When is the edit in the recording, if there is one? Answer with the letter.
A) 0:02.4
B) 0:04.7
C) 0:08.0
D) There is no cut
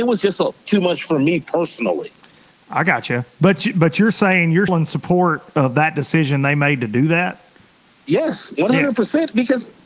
B